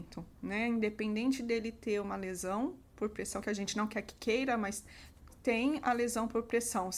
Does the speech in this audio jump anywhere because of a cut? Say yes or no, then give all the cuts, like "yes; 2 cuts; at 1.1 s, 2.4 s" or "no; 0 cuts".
no; 0 cuts